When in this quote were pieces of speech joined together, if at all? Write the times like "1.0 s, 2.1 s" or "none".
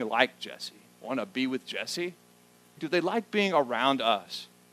2.8 s